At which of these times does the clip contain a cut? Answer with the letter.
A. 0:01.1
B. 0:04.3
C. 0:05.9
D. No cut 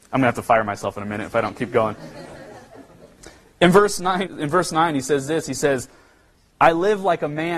B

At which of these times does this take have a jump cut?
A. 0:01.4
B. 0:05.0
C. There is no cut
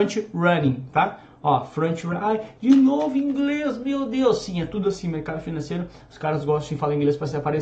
C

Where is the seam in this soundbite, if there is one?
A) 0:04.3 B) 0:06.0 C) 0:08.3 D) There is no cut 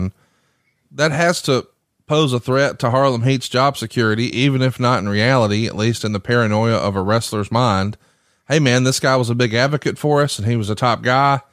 D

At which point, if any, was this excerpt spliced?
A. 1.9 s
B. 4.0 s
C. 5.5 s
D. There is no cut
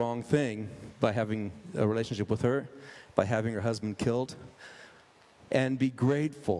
C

